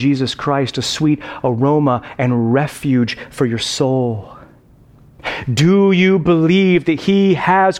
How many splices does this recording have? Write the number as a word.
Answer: zero